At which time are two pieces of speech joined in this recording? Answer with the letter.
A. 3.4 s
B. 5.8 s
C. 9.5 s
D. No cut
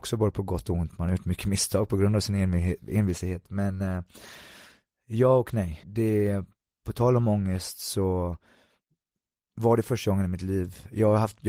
B